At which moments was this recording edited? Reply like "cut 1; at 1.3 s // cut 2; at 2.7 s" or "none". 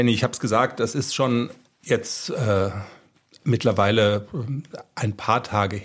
none